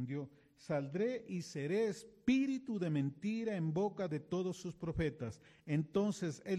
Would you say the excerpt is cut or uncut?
uncut